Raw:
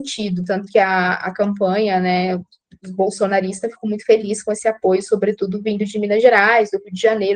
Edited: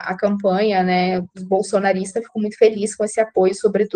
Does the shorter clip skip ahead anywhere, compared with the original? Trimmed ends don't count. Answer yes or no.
yes